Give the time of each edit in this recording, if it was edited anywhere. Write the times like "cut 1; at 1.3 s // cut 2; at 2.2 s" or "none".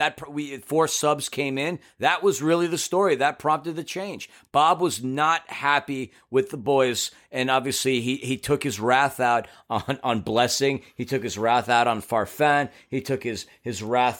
none